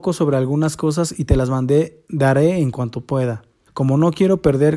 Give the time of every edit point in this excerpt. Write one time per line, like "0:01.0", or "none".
0:03.7